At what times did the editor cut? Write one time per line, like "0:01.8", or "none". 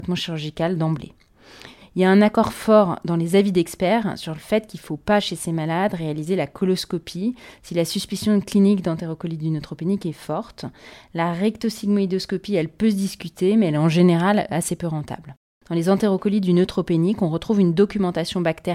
0:15.6